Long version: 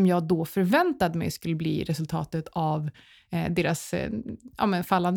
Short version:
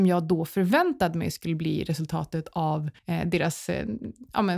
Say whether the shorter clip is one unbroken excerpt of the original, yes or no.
no